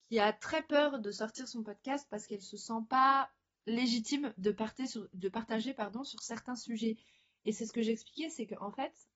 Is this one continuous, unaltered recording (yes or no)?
yes